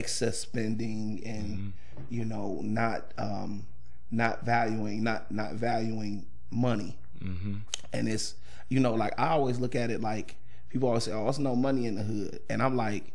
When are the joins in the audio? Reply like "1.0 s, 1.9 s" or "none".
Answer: none